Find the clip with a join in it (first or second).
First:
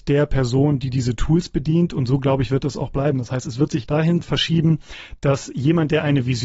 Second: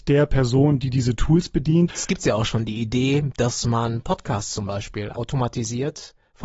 second